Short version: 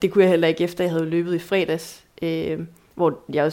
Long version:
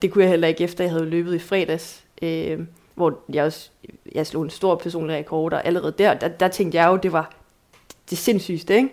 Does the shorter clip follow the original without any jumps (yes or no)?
yes